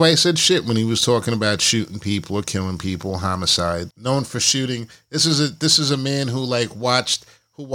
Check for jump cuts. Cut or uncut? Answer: cut